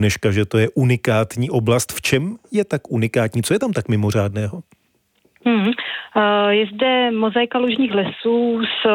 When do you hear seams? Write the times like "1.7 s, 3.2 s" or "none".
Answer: none

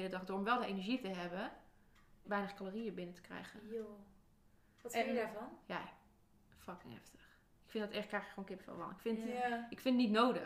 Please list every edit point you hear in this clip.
2.2 s

